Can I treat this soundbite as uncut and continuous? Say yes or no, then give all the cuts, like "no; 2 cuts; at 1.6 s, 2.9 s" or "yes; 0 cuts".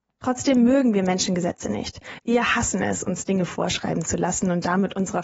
yes; 0 cuts